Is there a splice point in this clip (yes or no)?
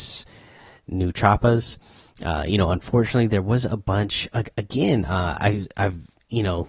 no